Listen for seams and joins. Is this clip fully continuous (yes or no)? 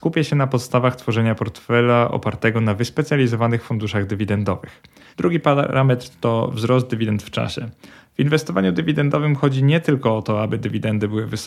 no